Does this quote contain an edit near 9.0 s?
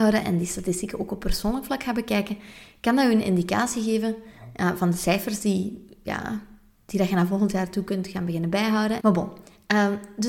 yes; 1 cut; at 9.0 s

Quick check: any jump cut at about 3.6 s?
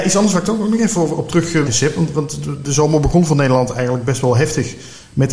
no; 1 cut; at 1.7 s

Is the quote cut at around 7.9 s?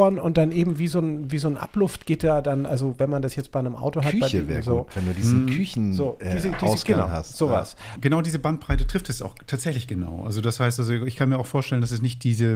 yes; 1 cut; at 7.9 s

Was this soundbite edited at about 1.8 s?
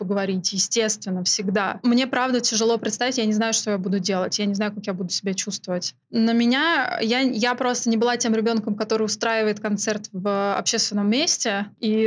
no; 0 cuts

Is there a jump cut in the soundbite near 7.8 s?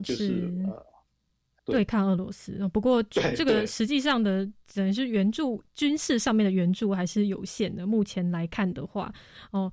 no; 1 cut; at 1.6 s

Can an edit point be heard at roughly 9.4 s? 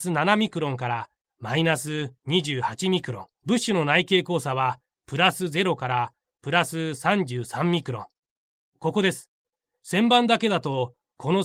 no; 1 cut; at 3.3 s

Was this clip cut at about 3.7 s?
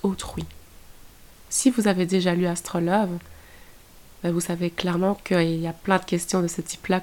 no; 1 cut; at 1.5 s

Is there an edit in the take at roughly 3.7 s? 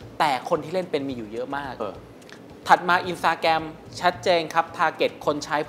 no; 1 cut; at 1.8 s

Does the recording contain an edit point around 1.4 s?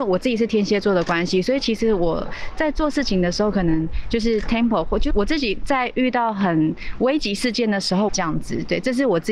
no; 2 cuts; at 5.1 s, 8.1 s

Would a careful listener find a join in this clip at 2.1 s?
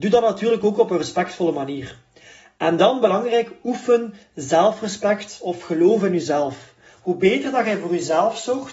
no; 1 cut; at 6.9 s

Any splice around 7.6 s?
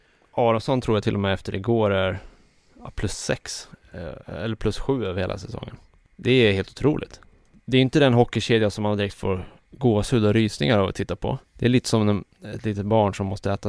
no; 1 cut; at 11.4 s

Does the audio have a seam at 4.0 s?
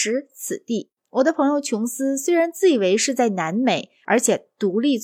no; 1 cut; at 1.0 s

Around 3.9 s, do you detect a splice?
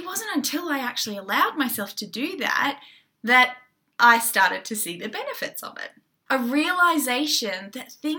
no; 1 cut; at 6.3 s

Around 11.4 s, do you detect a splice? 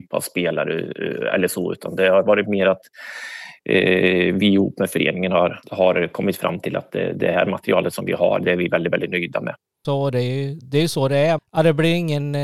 yes; 3 cuts; at 5.6 s, 9.8 s, 11.4 s

